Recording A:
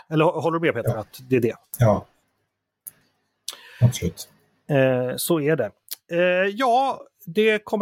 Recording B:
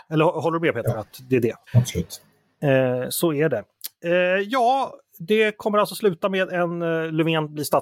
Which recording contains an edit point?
B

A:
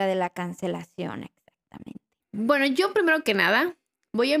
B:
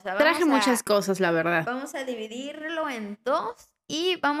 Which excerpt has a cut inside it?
A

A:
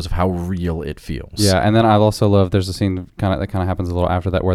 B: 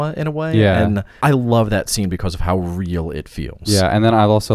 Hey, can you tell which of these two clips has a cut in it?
B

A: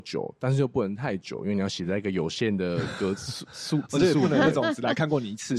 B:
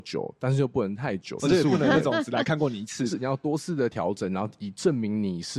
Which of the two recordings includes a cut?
B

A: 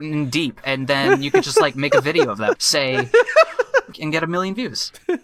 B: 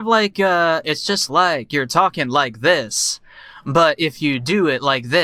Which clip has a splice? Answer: A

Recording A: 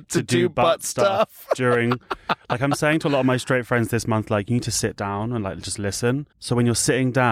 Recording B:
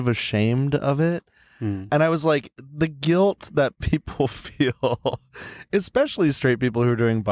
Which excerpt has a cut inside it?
A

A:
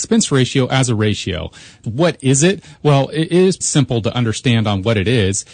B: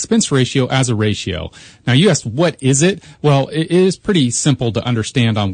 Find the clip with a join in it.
A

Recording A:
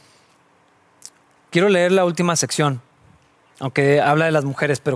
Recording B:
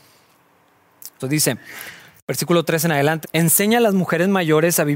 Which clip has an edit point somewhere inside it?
B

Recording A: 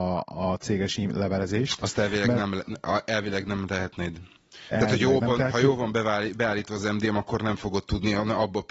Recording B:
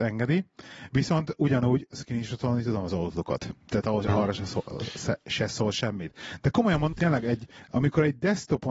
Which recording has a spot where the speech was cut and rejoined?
B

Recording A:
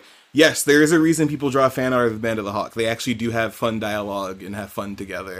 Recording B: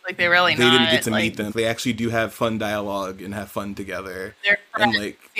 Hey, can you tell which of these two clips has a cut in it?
B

